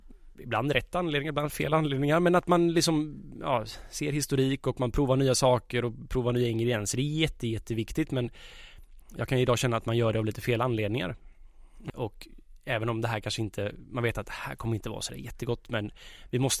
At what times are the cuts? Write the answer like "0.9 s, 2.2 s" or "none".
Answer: 11.9 s